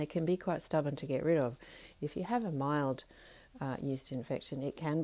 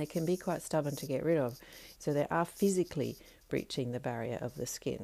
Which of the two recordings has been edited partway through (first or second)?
second